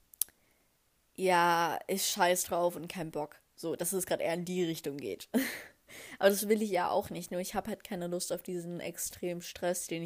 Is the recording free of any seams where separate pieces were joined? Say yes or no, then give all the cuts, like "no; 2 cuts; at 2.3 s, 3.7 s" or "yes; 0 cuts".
yes; 0 cuts